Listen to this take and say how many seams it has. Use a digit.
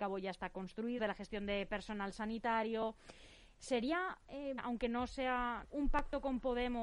3